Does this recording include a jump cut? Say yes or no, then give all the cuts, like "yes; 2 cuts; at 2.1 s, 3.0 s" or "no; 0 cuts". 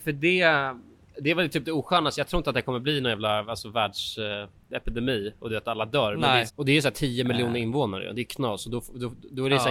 yes; 1 cut; at 6.5 s